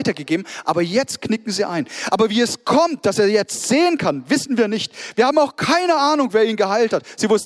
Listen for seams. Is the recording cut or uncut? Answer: uncut